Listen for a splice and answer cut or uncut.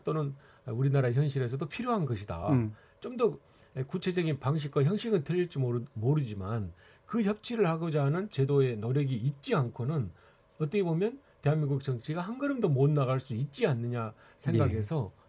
uncut